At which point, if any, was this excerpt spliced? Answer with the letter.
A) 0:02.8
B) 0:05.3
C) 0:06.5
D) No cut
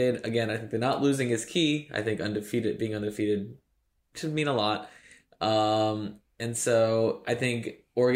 D